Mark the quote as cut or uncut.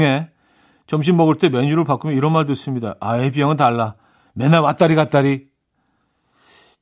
uncut